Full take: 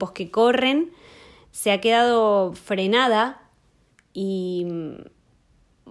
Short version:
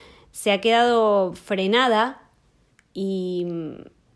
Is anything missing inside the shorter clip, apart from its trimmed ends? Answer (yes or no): no